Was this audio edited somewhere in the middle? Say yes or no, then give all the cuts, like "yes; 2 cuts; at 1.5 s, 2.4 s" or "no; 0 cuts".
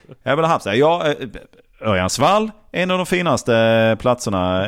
no; 0 cuts